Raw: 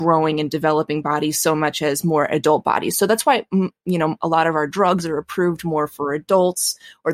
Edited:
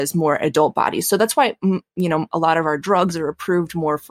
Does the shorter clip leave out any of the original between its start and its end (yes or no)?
no